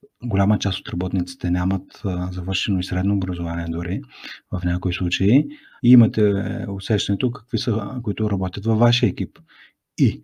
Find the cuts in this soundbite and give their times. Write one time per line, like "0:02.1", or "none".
0:05.8
0:08.0